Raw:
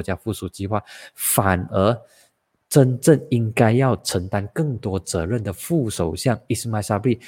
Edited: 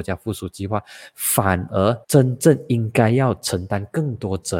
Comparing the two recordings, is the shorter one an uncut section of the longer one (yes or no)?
no